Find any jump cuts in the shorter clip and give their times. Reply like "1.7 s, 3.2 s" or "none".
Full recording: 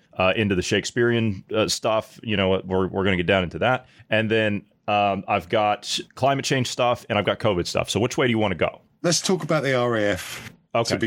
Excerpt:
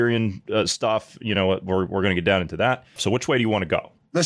3.0 s